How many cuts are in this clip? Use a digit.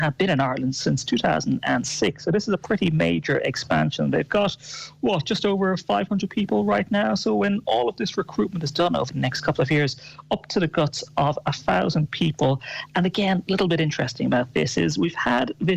0